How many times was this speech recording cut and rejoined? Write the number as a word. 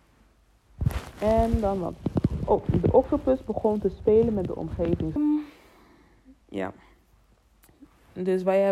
two